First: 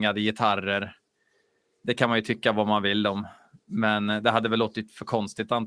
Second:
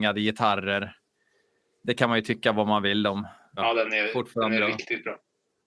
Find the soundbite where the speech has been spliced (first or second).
second